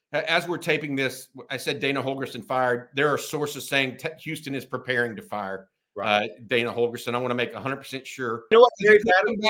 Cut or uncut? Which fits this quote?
cut